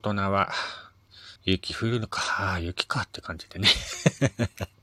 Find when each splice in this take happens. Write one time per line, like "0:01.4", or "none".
0:01.4